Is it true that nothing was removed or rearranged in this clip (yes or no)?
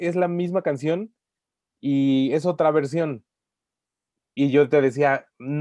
yes